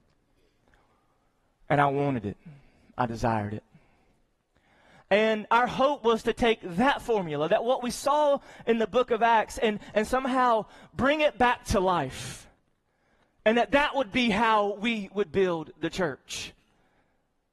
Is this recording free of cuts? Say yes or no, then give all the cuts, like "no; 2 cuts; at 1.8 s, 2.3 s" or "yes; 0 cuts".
yes; 0 cuts